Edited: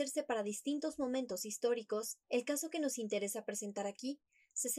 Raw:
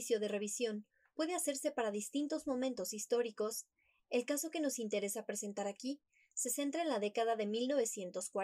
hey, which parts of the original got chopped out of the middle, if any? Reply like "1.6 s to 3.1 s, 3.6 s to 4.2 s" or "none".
3.7 s to 4.0 s

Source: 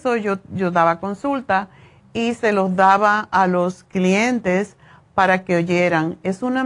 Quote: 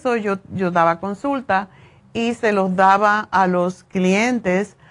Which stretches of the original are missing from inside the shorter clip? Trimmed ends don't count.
none

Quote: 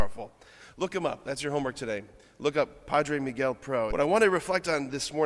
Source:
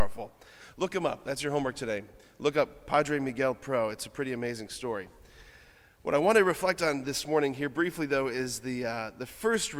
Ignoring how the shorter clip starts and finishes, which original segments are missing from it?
3.9 s to 6.0 s

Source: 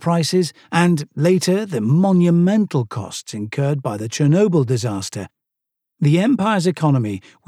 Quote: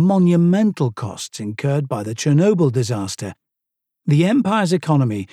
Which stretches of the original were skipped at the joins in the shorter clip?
none

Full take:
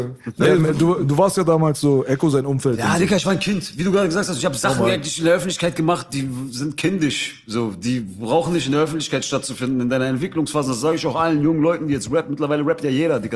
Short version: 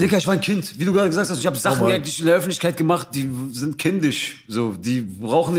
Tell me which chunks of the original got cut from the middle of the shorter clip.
none

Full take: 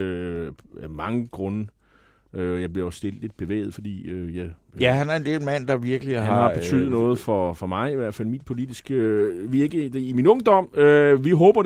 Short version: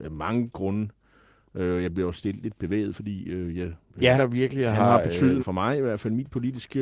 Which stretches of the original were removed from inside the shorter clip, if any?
4.9 s to 5.7 s, 6.9 s to 7.5 s

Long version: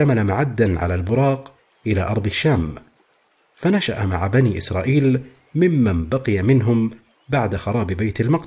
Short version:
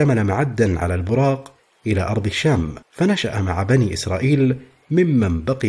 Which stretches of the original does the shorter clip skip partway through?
2.8 s to 3.5 s

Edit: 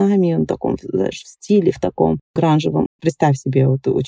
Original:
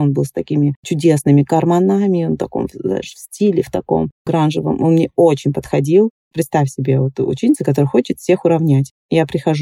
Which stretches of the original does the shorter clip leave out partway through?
4.8 s to 6.2 s

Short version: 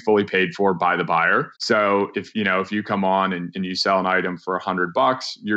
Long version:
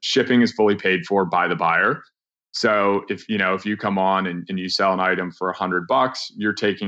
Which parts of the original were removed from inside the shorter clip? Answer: 2.1 s to 2.5 s

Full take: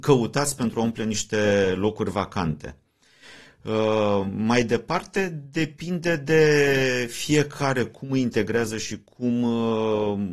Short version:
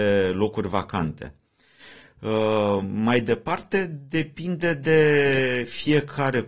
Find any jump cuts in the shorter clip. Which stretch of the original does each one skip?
none

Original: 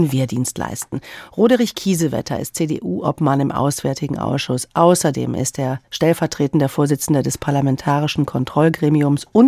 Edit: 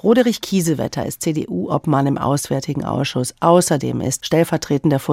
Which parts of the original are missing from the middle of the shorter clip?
5.5 s to 5.9 s

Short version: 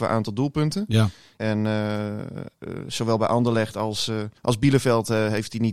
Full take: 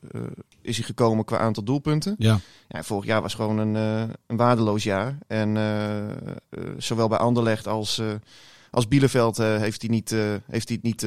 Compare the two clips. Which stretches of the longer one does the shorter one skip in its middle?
2.7 s to 5.3 s, 8.3 s to 8.7 s

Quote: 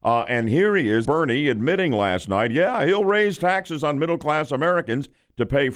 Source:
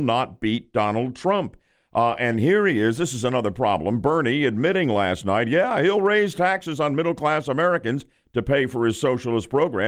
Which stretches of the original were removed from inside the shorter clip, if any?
3.0 s to 4.0 s

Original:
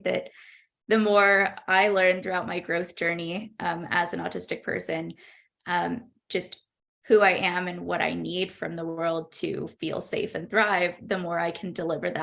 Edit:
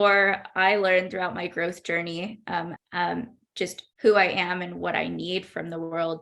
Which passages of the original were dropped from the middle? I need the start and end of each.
3.9 s to 5.5 s, 6.7 s to 7.0 s

